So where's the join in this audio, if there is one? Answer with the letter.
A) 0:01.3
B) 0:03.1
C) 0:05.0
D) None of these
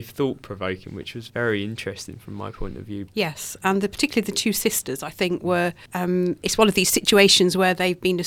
B